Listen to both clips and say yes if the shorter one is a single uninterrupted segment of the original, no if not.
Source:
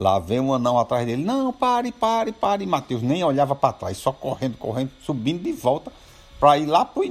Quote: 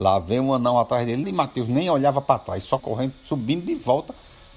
no